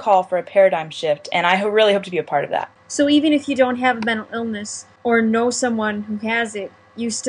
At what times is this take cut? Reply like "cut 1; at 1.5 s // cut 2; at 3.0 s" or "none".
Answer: none